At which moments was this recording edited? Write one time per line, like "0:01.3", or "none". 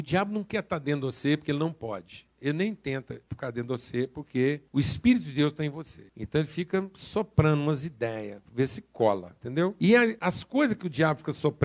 none

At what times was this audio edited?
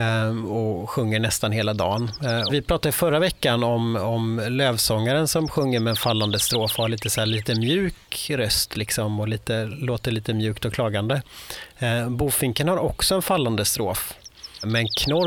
0:02.5

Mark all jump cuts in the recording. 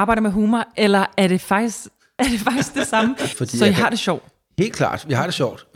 0:03.3

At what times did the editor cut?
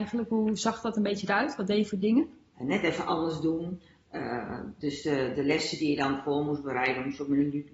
0:02.5

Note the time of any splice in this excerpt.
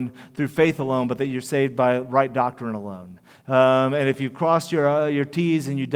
none

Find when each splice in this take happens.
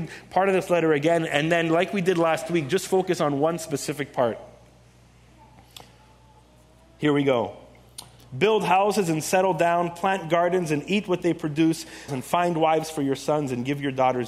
0:08.2
0:12.1

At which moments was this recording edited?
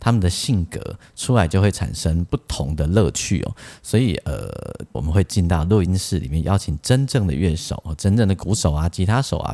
0:04.9

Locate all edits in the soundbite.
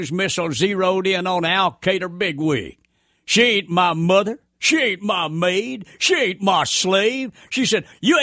none

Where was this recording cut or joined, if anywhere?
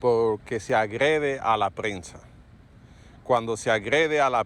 none

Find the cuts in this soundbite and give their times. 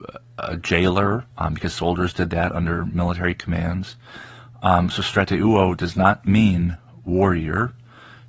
0:01.3

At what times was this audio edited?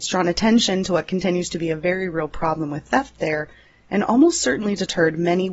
none

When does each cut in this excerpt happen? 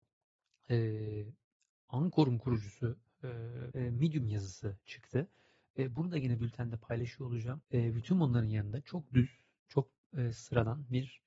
0:03.7
0:07.6

